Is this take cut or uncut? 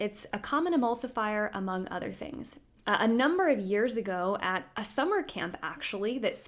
cut